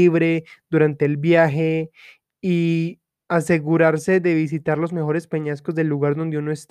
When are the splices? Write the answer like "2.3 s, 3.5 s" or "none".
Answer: 3.2 s

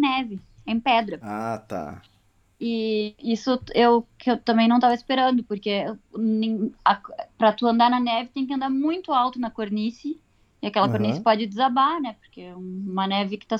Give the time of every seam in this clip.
none

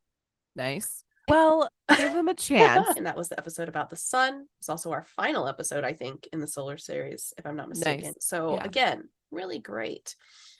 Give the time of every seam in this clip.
1.3 s, 3.0 s, 8.1 s

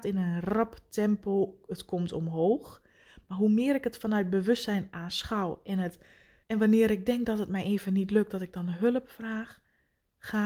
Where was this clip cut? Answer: 6.4 s

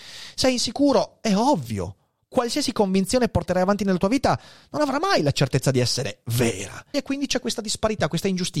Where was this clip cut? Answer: 6.9 s

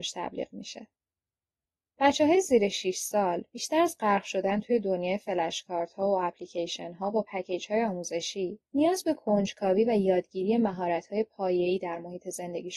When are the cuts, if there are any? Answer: 8.6 s

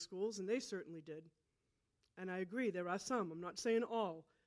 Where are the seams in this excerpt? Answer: none

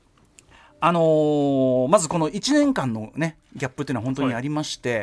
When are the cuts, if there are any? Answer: none

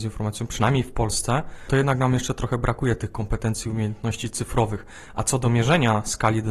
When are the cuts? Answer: none

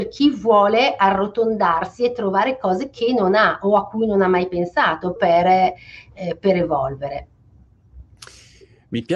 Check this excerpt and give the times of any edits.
5.2 s

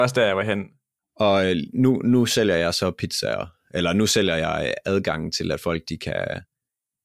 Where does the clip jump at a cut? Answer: 1.0 s

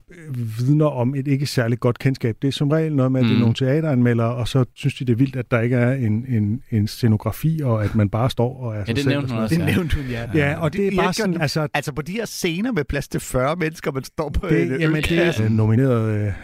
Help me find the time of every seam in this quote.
11.3 s, 15.4 s

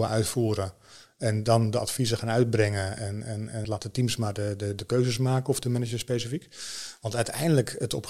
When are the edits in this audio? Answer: none

